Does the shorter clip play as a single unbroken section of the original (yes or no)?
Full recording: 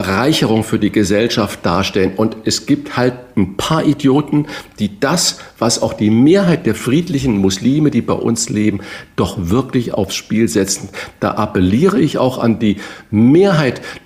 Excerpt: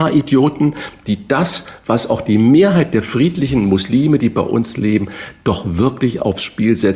yes